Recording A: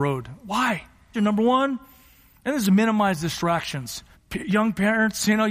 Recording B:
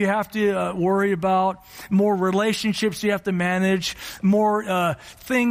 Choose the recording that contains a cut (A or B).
A